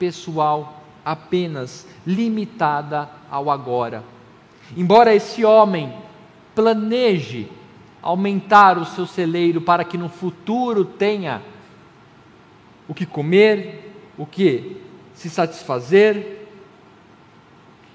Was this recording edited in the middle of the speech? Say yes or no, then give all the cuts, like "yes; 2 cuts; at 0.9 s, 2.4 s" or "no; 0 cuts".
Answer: no; 0 cuts